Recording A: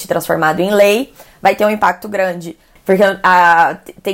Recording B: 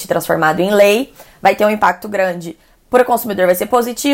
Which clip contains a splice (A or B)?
A